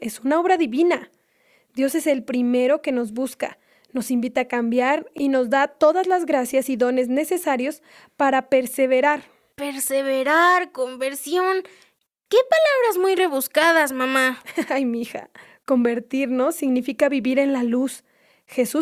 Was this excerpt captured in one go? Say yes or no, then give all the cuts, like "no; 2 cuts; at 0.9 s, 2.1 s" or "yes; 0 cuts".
yes; 0 cuts